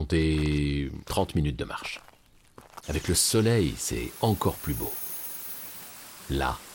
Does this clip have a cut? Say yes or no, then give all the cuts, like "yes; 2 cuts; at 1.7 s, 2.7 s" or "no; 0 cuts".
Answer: yes; 1 cut; at 2.8 s